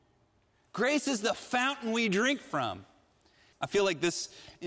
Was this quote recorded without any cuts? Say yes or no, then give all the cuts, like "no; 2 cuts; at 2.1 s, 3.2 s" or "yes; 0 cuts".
no; 1 cut; at 3.5 s